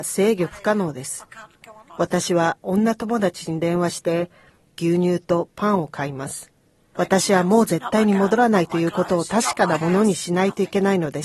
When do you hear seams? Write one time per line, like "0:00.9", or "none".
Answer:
0:04.6
0:06.9